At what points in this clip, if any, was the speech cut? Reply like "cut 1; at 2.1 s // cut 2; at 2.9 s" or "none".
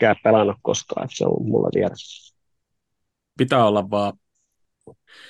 cut 1; at 3.4 s